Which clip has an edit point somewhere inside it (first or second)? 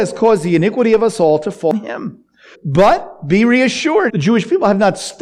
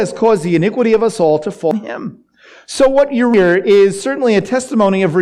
first